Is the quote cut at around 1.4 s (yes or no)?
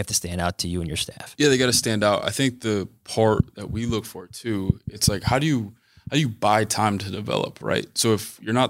no